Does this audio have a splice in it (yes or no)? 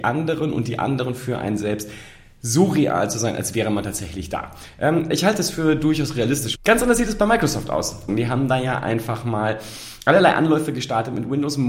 yes